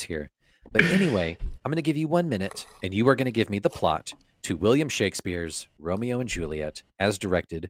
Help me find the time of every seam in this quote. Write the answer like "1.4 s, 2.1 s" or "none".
1.6 s